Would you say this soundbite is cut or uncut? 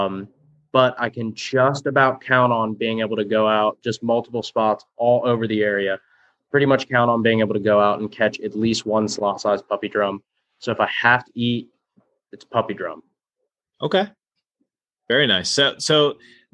uncut